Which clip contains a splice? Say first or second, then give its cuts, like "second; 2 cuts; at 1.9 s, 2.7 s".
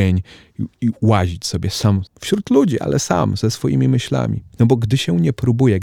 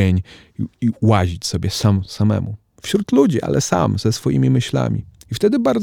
first; 2 cuts; at 2.1 s, 4.5 s